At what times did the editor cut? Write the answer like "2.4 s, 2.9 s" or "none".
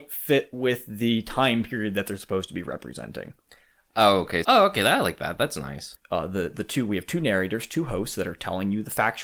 4.4 s, 5.9 s